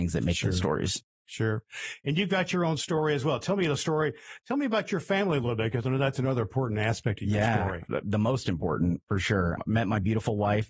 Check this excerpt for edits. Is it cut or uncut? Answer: uncut